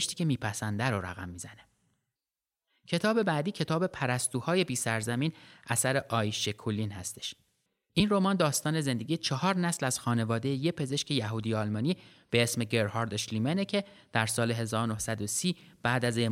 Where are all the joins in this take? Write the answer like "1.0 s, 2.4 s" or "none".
none